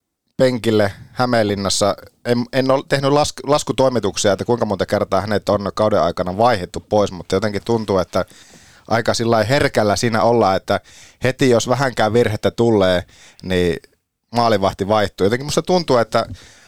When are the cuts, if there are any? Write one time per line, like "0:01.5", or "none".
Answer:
none